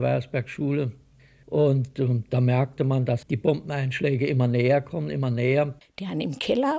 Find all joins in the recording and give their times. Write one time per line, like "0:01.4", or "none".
0:03.2
0:05.8

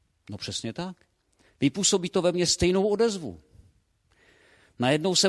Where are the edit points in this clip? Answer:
none

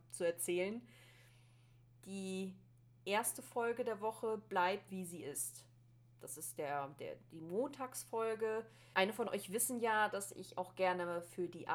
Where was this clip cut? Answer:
0:04.9
0:08.9

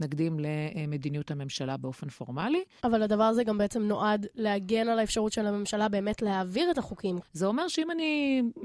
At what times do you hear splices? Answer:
0:02.8
0:07.2

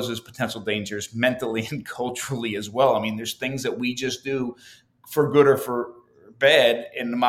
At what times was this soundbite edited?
none

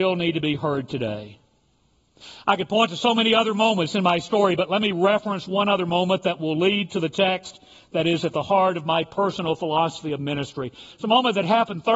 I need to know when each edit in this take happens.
0:10.9

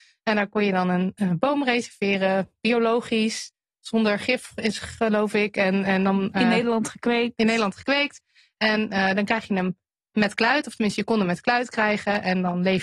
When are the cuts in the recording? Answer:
none

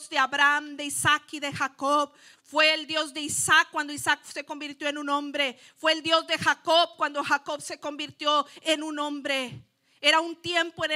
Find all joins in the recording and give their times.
0:02.3

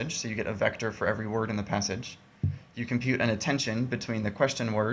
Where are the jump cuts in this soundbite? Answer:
none

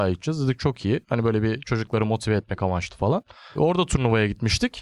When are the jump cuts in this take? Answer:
none

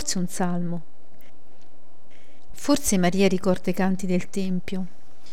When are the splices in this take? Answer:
none

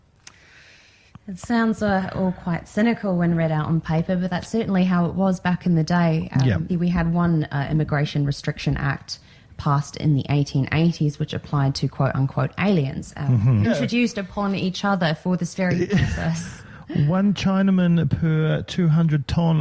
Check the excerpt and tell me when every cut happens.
0:06.7
0:13.6

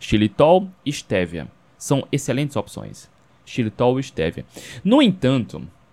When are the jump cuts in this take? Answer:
none

